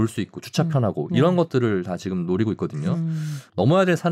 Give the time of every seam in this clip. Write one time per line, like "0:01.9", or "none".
none